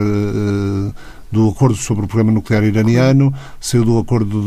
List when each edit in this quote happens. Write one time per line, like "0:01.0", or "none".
none